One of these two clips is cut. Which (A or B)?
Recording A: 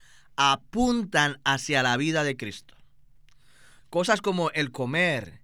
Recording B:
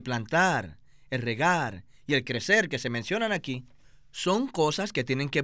A